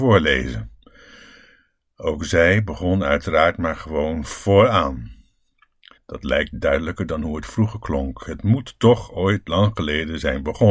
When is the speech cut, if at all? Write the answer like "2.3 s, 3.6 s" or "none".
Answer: 6.0 s